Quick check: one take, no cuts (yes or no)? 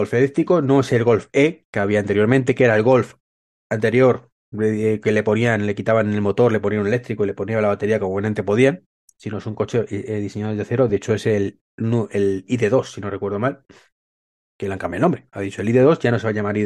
yes